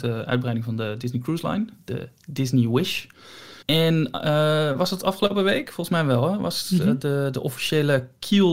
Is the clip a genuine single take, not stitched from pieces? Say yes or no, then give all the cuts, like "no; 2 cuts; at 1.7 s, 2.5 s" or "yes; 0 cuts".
no; 1 cut; at 3.6 s